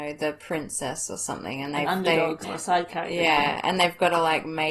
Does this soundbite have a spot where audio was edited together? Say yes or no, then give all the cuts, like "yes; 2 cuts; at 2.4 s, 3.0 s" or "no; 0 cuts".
yes; 1 cut; at 2.4 s